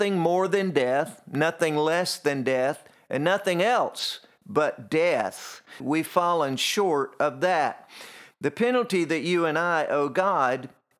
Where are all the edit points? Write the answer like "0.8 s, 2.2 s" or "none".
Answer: 5.8 s, 8.3 s